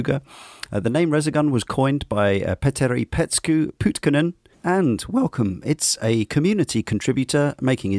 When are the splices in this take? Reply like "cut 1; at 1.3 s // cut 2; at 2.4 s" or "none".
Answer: cut 1; at 4.5 s